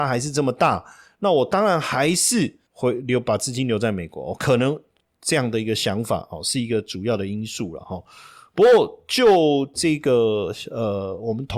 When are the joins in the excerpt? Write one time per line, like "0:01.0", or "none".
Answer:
0:09.7